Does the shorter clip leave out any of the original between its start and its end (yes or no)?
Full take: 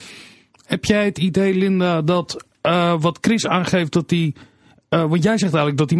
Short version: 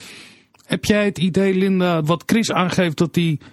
yes